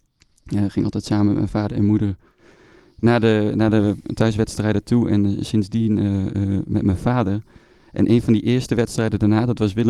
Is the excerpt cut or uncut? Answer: uncut